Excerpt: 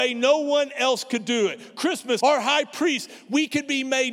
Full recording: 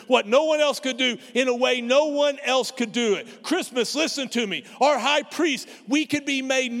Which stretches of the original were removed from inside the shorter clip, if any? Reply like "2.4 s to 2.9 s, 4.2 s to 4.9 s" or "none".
3.9 s to 4.8 s